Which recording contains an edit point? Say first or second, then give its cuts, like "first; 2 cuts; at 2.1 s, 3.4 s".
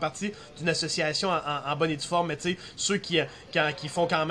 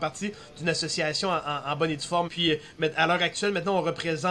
second; 1 cut; at 2.3 s